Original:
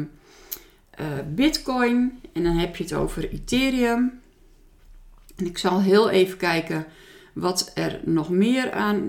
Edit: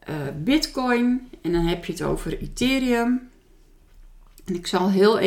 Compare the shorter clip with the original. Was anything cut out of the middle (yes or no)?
no